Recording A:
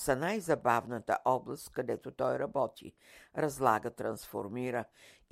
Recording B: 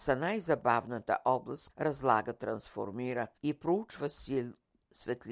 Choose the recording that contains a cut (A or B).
B